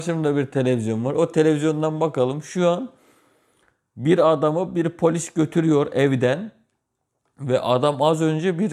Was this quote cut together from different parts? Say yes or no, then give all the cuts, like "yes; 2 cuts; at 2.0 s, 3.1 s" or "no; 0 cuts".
no; 0 cuts